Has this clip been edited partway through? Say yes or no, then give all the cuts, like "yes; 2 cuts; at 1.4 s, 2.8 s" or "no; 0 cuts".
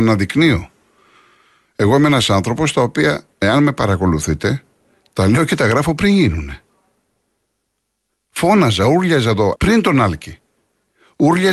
yes; 2 cuts; at 3.3 s, 9.6 s